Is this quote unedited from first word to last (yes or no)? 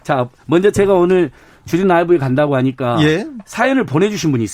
yes